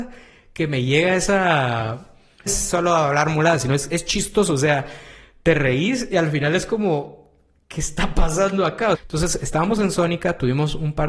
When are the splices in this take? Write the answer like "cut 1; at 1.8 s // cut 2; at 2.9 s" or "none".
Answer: cut 1; at 2.5 s // cut 2; at 8.9 s